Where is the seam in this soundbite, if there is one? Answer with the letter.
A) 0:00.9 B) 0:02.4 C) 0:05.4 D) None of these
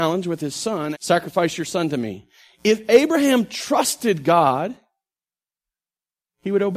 A